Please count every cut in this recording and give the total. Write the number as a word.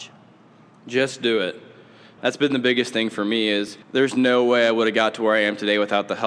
two